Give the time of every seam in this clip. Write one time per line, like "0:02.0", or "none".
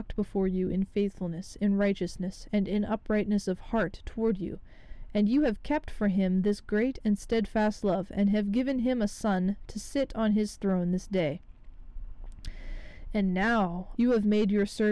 0:13.9